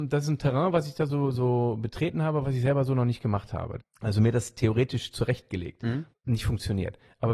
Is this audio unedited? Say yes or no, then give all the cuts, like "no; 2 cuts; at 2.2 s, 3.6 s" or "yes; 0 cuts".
no; 3 cuts; at 1.3 s, 3.8 s, 6.1 s